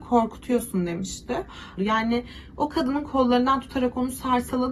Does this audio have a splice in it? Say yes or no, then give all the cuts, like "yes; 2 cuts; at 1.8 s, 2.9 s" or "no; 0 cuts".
yes; 1 cut; at 1.8 s